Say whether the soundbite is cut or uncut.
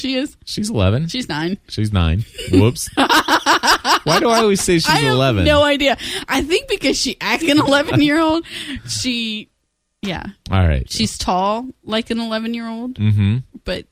cut